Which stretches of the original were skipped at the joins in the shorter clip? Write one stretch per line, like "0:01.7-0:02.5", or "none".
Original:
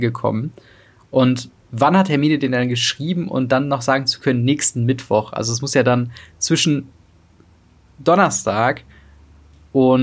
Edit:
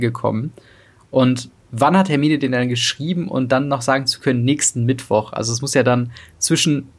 none